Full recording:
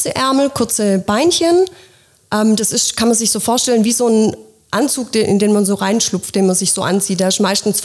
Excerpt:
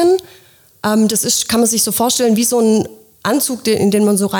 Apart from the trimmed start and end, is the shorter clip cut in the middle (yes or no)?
no